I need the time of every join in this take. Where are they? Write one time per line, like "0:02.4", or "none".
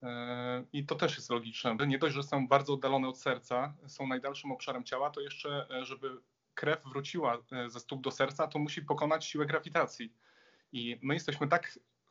0:01.8